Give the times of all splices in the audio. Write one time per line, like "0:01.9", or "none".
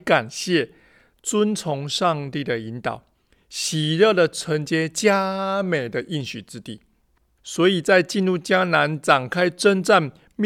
0:07.4